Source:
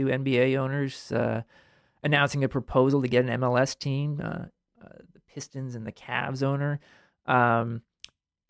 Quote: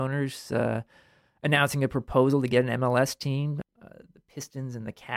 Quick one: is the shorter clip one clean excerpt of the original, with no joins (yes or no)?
no